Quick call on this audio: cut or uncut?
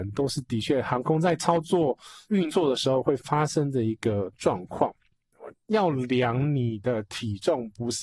cut